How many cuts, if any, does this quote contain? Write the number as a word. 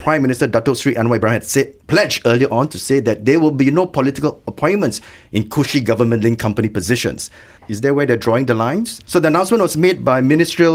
two